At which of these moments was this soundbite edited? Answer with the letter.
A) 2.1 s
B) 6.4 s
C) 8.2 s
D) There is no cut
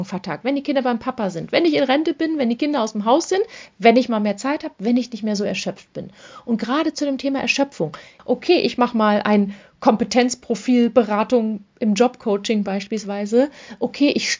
C